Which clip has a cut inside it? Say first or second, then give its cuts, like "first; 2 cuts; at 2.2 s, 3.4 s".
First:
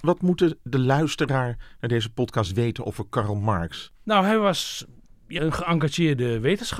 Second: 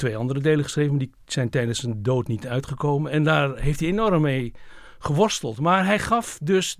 first; 2 cuts; at 4.0 s, 5.4 s